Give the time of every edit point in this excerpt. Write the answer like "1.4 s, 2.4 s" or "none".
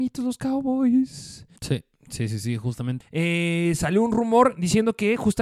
1.6 s, 3.0 s